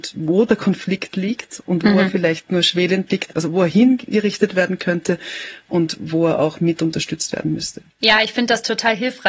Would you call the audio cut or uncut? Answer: cut